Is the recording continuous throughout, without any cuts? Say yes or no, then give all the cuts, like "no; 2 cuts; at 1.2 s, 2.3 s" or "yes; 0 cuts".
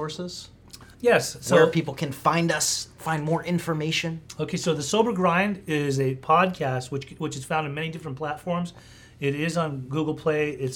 no; 1 cut; at 0.9 s